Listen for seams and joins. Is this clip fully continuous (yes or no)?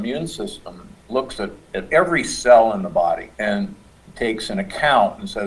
no